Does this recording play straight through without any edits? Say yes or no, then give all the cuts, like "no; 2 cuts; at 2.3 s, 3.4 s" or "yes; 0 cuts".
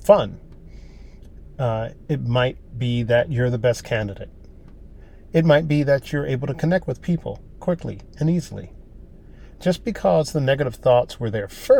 yes; 0 cuts